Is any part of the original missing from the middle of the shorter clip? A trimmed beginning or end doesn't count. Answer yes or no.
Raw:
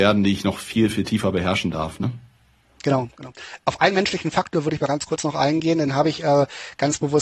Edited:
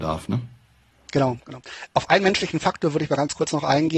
no